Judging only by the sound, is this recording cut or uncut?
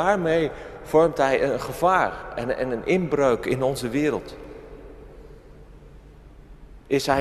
uncut